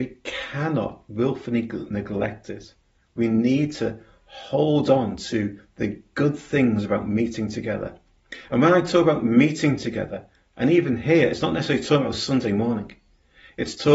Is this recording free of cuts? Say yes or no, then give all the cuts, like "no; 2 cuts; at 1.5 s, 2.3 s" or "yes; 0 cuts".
yes; 0 cuts